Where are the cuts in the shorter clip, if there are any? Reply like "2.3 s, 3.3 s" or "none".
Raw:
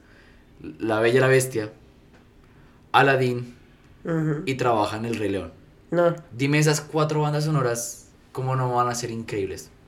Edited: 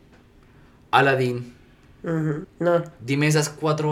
2.4 s